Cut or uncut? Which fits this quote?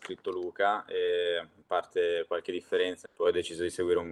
cut